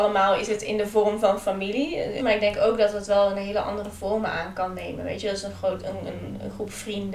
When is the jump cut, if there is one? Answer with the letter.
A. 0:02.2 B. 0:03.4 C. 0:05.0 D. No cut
A